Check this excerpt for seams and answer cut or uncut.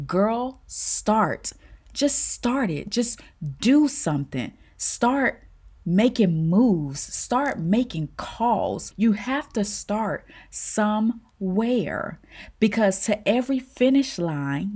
cut